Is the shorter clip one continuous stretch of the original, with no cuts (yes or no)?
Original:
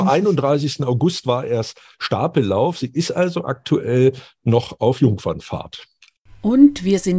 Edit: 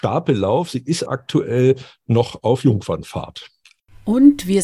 no